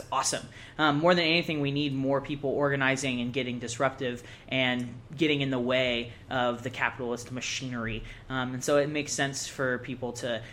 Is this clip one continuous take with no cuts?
yes; 0 cuts

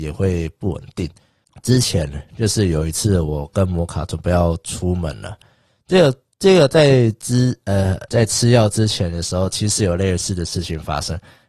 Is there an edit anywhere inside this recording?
yes; 1 cut; at 8.1 s

